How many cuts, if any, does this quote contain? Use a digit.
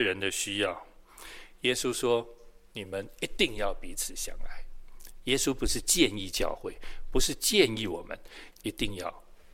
1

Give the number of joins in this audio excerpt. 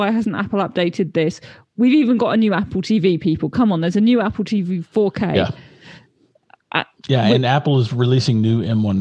0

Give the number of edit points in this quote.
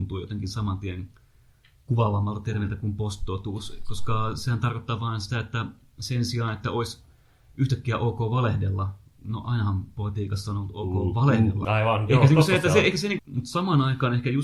2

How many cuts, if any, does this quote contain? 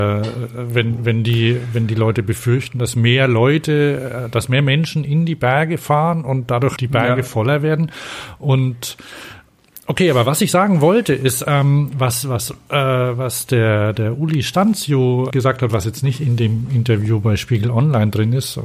2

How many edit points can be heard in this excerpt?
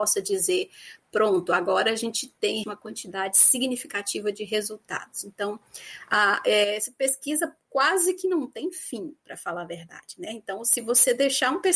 1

